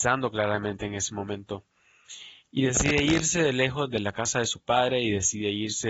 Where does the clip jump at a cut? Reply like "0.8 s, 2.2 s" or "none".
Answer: none